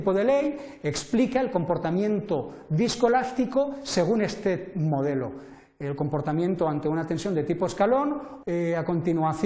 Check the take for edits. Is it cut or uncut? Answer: cut